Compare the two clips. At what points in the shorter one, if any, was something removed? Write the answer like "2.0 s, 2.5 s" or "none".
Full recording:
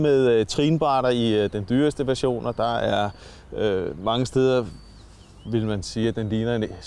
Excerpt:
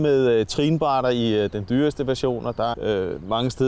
2.7 s